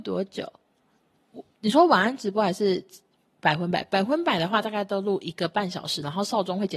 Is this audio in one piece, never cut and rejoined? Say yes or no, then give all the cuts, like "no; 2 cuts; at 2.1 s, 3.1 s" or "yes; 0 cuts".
yes; 0 cuts